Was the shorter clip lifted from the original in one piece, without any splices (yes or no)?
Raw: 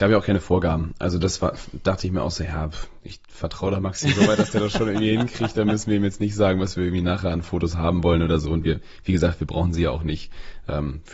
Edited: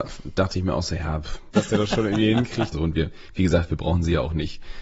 no